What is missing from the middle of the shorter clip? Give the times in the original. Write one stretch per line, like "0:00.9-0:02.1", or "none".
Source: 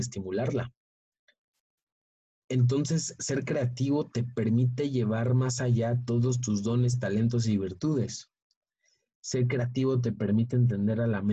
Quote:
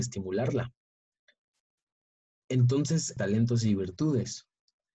0:03.2-0:07.0